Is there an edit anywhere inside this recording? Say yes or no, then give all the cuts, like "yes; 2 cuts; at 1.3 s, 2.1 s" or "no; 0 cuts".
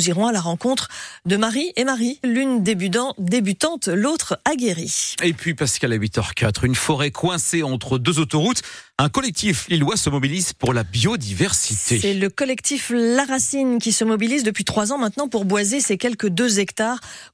yes; 1 cut; at 2.2 s